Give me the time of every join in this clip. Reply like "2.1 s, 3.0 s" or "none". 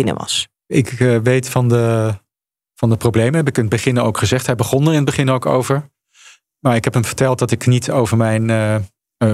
none